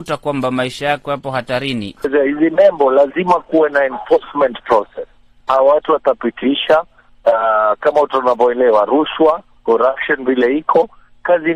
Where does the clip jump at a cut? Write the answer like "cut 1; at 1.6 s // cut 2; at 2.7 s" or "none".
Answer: cut 1; at 2.0 s // cut 2; at 5.4 s